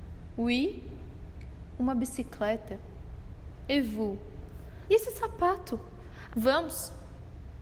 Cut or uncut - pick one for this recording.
cut